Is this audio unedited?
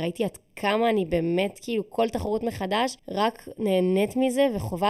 no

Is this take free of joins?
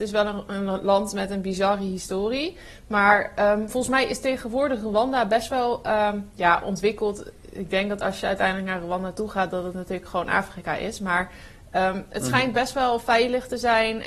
yes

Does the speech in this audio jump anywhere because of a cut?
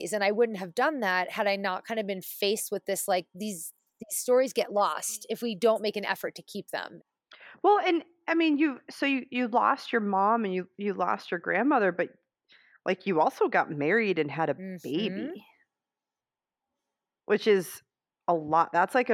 no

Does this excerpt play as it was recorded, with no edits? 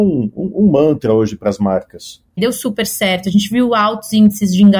no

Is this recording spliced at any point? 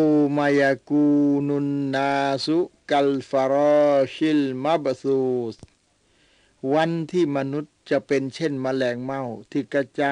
no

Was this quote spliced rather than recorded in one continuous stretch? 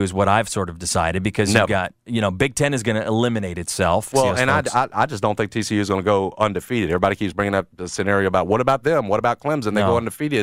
yes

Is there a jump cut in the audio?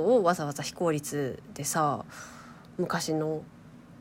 no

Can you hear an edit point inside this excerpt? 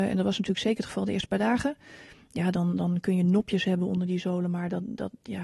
no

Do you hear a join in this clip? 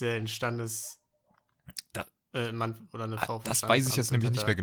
no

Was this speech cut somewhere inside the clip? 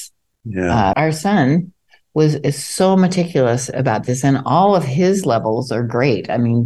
yes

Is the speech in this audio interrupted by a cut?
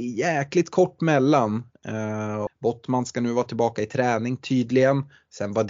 yes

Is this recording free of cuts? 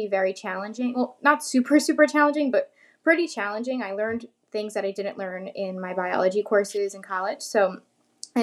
yes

